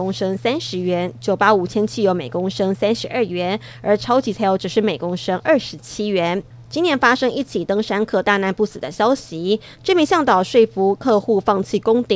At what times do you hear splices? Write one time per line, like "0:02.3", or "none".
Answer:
0:06.6
0:09.7